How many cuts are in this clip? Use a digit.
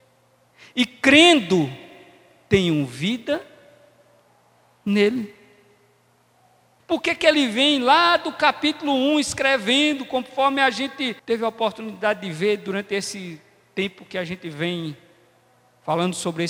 2